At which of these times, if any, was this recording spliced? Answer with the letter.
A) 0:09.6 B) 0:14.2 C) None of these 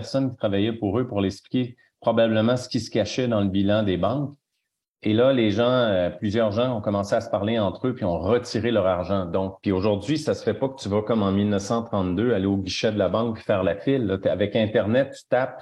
A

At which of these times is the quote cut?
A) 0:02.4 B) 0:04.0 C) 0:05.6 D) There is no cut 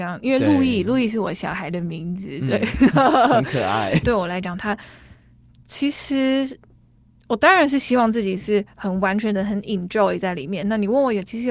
B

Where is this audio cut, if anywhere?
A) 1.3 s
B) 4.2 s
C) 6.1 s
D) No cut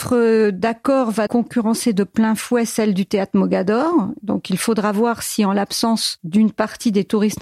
A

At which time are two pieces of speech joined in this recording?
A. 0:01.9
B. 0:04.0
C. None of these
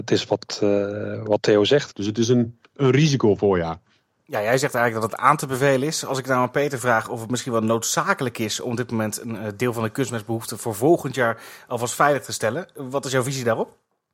A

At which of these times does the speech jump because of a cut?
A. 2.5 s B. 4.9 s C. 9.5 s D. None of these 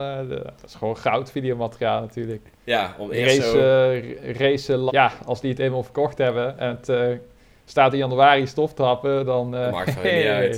B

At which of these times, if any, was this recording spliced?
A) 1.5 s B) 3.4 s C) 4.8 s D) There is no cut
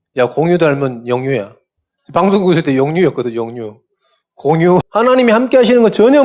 C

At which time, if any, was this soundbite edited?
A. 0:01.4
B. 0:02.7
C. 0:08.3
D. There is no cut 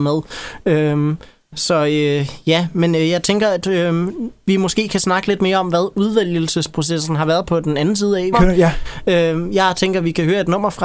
C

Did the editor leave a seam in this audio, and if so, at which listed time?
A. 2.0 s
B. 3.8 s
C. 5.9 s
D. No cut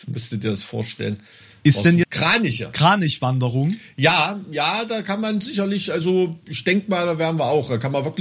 A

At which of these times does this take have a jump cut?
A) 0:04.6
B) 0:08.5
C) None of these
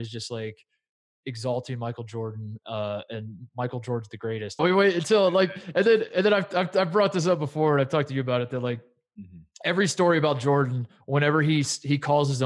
A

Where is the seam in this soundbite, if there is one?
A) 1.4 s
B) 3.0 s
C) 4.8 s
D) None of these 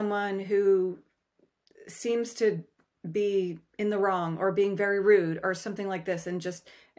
D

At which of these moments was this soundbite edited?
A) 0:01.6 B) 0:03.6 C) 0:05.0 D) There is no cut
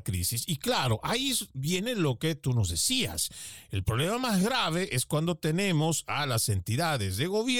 D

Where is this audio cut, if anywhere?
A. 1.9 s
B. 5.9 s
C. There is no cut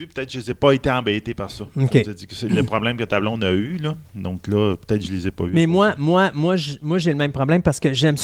C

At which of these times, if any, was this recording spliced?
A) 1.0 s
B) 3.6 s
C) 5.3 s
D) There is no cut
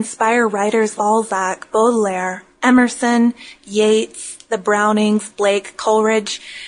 A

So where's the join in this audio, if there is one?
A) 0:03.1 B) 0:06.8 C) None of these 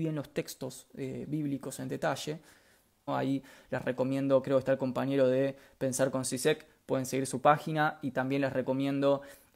A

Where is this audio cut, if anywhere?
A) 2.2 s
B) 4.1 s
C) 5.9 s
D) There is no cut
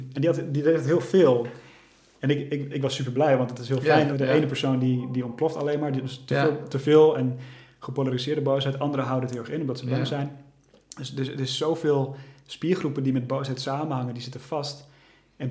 B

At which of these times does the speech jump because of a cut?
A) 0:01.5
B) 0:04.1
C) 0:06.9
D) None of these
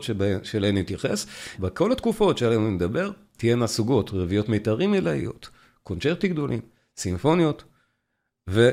A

